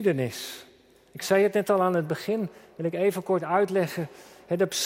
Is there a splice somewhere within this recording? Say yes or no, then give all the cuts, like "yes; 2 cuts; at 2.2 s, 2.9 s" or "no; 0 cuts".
no; 0 cuts